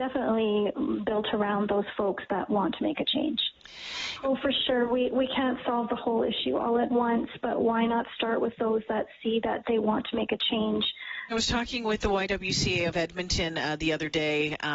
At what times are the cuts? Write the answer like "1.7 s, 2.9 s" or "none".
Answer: 4.2 s, 11.3 s